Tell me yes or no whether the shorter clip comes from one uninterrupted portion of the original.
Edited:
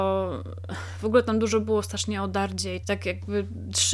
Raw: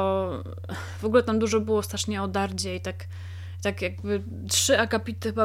no